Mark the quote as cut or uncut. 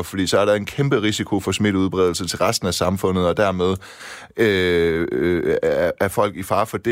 uncut